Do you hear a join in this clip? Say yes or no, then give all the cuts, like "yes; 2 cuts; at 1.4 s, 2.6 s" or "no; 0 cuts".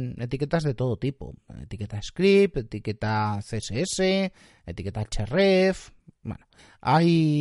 no; 0 cuts